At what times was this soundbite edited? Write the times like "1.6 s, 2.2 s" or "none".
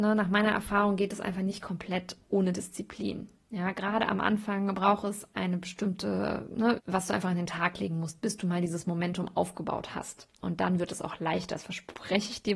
6.8 s